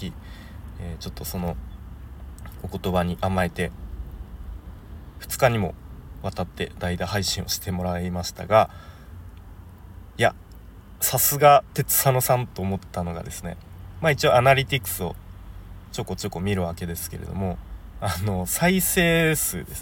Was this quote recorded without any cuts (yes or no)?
yes